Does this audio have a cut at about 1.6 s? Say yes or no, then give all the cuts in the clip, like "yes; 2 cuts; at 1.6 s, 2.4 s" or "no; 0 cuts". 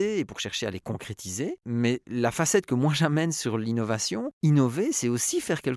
no; 1 cut; at 4.3 s